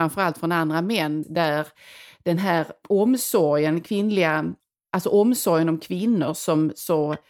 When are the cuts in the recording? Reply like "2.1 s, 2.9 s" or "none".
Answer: 1.2 s